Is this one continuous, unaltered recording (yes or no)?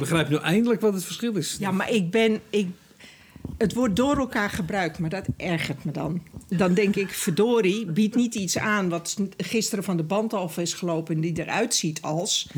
yes